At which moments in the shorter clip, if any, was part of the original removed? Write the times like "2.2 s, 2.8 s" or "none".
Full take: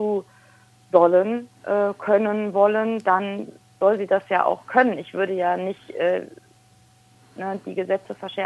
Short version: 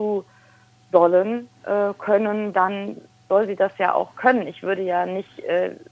2.5 s